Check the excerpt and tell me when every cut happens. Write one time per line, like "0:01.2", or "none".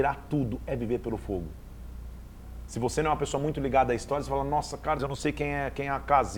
0:02.7
0:05.0